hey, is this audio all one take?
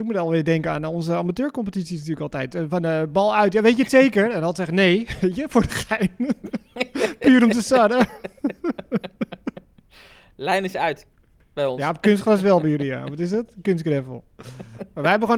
yes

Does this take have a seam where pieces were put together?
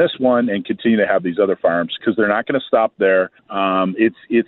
yes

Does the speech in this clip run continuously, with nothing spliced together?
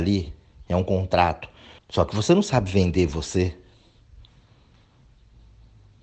no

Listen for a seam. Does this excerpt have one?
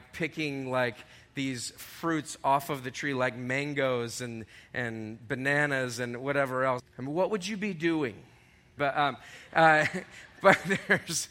yes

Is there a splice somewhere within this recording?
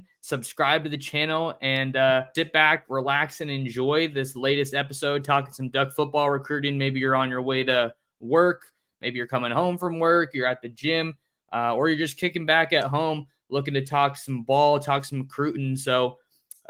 yes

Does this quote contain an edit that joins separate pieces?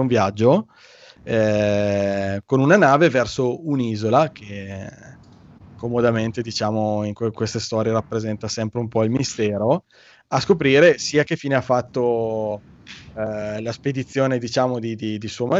no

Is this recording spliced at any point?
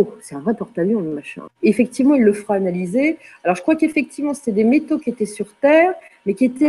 yes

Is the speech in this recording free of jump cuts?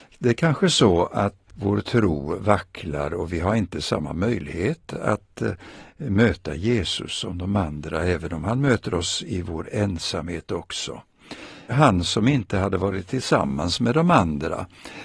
no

